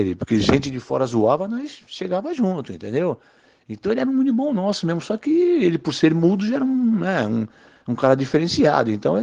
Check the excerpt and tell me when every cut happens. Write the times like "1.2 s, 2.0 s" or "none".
none